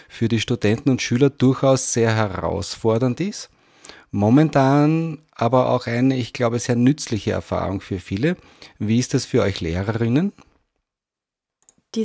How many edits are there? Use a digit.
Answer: 0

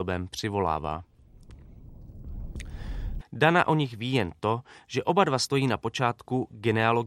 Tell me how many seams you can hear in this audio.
1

